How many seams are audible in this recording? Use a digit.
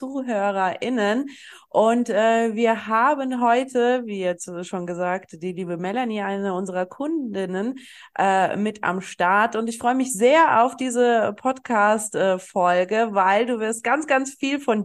0